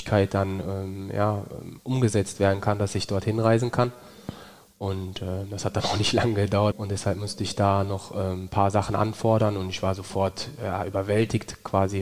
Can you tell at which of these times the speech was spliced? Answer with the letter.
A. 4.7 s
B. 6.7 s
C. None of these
B